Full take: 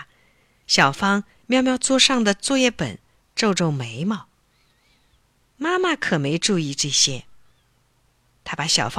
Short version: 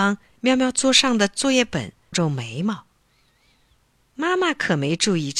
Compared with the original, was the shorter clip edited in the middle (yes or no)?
yes